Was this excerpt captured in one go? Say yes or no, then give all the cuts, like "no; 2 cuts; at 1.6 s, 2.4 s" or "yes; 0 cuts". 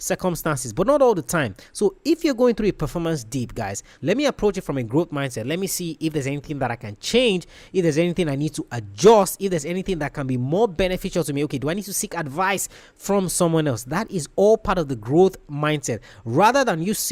no; 1 cut; at 3.9 s